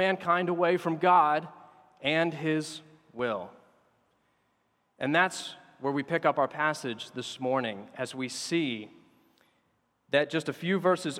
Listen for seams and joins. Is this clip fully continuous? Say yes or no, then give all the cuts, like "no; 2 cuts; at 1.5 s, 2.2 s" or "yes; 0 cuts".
yes; 0 cuts